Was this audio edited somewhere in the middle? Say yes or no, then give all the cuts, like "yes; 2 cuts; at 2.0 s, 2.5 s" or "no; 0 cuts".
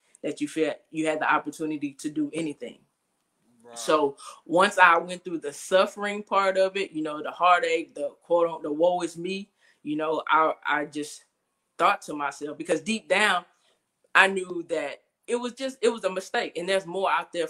no; 0 cuts